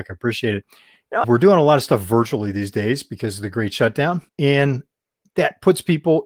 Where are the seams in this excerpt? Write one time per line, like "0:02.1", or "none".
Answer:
0:01.2
0:04.3